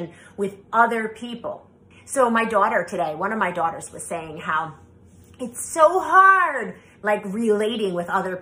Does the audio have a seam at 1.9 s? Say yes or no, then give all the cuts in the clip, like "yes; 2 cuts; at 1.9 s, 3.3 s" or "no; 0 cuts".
yes; 1 cut; at 1.9 s